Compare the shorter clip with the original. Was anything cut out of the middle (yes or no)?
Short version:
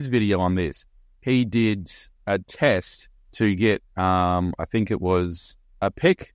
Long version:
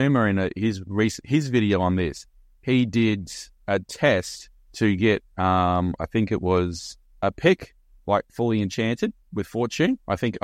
no